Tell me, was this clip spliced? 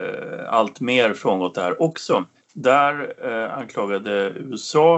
yes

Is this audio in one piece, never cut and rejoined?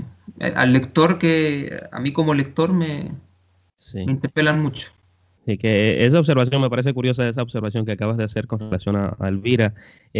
yes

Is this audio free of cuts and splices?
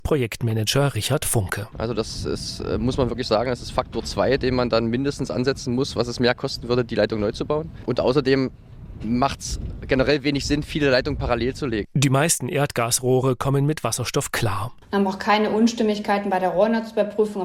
no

